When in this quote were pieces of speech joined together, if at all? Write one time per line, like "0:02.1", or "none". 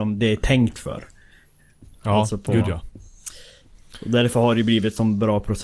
none